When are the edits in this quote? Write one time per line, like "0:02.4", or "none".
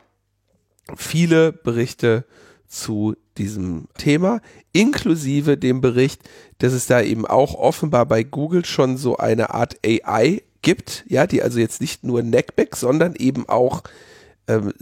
0:03.9

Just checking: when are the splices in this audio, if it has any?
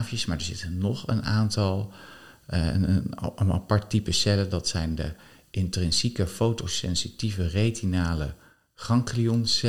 none

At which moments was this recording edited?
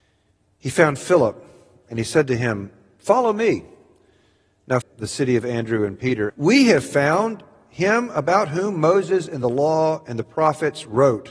0:04.8
0:06.3

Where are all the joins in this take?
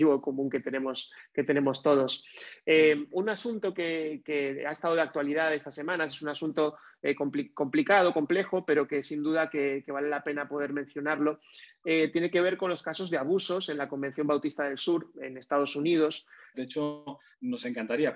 0:16.5

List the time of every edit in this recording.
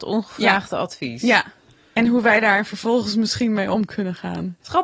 none

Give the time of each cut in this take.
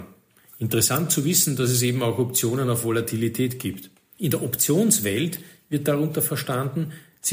0:04.2

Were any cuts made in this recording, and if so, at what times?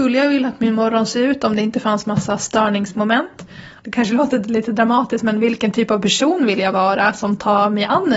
0:03.8

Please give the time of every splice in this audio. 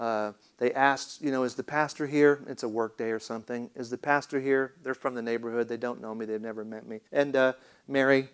0:07.1

